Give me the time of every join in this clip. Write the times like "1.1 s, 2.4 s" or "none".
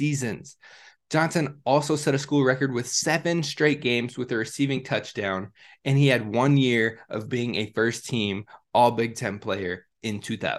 none